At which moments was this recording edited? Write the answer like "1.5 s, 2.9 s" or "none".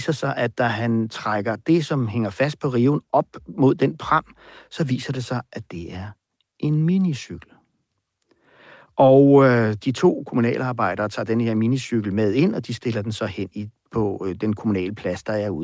none